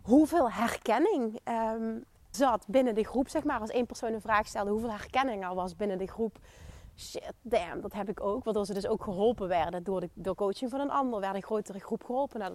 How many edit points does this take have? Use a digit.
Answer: 1